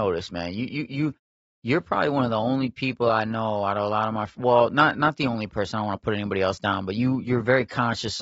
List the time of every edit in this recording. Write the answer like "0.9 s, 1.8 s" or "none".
none